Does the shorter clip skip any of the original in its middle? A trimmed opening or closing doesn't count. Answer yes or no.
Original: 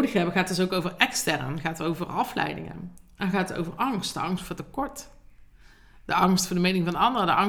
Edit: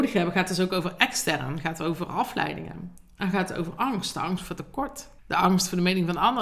yes